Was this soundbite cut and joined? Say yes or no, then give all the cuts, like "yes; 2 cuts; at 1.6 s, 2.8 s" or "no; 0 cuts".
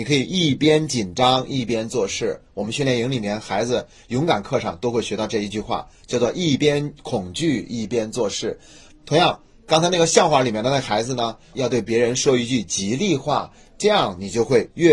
yes; 2 cuts; at 8.9 s, 11.5 s